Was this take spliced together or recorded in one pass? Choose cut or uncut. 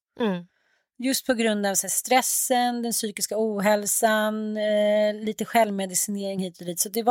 uncut